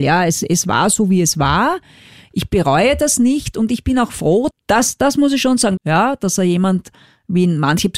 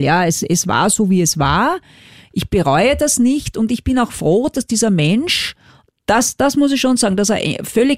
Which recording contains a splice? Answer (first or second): first